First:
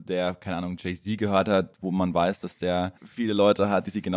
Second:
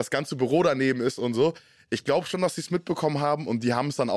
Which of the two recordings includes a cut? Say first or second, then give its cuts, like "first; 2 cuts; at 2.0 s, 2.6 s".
first; 1 cut; at 3.0 s